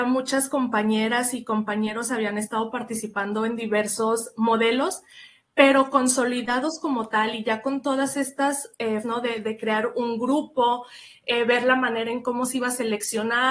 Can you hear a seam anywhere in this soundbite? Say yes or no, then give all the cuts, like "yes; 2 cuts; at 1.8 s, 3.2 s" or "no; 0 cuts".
yes; 1 cut; at 9.0 s